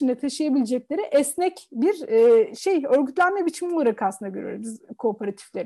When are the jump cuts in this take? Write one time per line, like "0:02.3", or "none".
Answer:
none